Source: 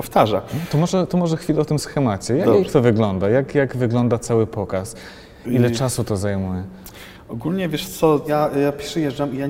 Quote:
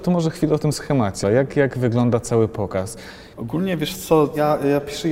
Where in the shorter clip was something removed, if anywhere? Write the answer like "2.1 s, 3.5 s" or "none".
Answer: 1.2 s, 3.3 s